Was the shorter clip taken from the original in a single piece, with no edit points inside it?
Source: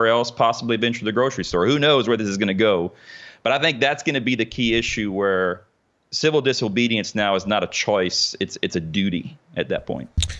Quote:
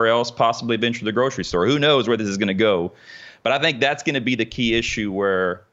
yes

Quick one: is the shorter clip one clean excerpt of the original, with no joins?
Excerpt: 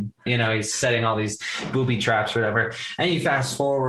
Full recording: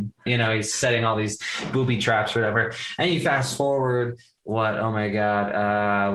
yes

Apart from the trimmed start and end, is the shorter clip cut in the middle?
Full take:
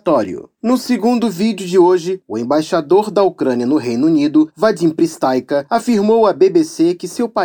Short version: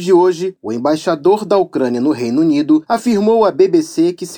yes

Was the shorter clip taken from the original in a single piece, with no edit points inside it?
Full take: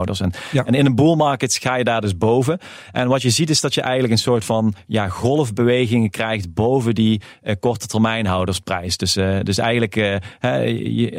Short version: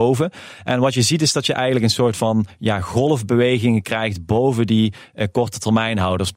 yes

